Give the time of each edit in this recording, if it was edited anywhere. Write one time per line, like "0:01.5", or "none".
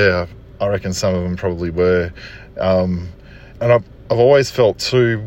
0:03.5